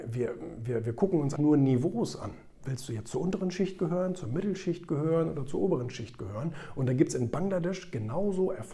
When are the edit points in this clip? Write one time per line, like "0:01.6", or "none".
0:01.3